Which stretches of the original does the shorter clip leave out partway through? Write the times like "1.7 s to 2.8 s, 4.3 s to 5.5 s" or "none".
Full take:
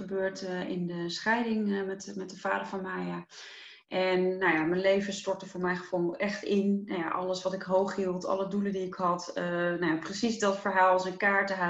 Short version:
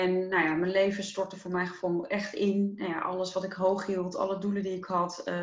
none